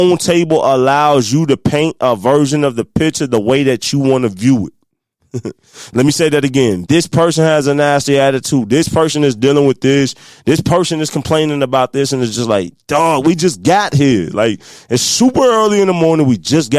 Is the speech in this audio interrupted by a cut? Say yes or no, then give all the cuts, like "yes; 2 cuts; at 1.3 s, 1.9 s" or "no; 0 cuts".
yes; 1 cut; at 6.8 s